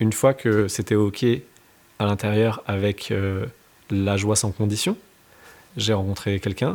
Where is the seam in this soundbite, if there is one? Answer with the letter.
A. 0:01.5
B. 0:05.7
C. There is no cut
B